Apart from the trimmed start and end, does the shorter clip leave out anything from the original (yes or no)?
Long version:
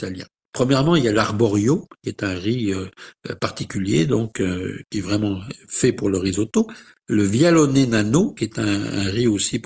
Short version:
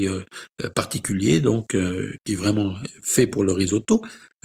no